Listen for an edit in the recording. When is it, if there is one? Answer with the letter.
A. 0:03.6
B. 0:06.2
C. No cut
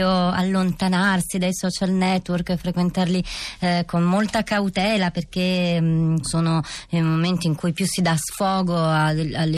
B